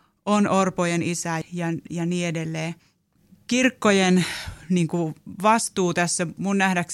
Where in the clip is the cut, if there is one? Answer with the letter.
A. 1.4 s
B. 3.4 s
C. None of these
A